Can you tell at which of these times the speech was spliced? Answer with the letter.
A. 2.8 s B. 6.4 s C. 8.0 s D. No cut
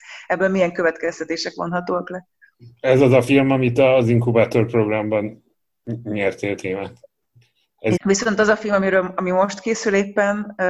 C